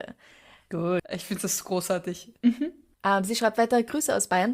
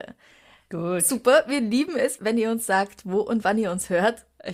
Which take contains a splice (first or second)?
first